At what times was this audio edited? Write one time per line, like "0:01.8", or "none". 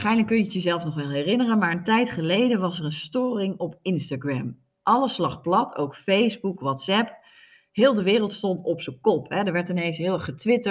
none